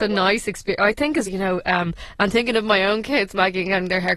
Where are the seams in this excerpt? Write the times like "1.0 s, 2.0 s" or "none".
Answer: 1.3 s